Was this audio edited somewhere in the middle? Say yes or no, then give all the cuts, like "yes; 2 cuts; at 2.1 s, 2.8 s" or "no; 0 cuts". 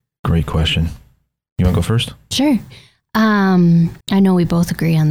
yes; 1 cut; at 4.0 s